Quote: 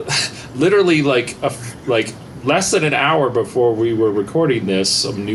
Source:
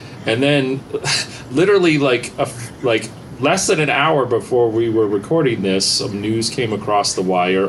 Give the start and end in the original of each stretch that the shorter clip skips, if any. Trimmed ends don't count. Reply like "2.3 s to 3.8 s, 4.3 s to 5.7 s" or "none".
none

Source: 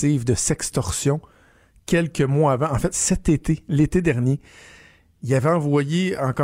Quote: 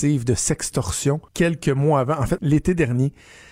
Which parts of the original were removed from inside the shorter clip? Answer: 1.3 s to 1.8 s, 2.9 s to 3.7 s

